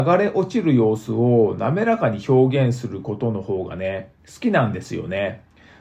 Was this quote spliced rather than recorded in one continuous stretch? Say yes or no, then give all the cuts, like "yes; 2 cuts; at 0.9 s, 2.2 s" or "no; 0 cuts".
no; 0 cuts